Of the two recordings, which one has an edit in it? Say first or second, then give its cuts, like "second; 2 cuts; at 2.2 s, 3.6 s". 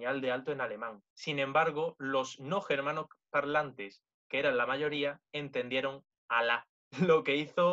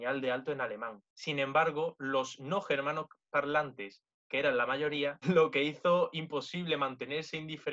second; 1 cut; at 5.2 s